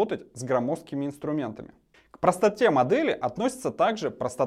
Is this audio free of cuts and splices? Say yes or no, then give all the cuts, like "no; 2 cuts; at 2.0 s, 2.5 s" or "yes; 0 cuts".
yes; 0 cuts